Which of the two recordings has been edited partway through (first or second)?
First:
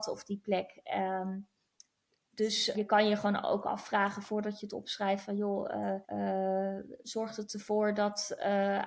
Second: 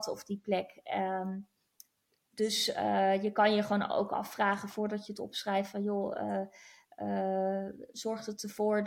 first